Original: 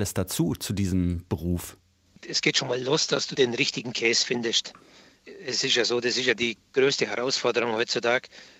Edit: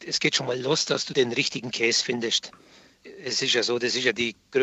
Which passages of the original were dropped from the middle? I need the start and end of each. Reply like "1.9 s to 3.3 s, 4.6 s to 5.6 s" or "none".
none